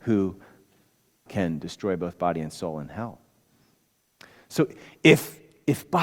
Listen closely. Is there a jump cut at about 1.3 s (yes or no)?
yes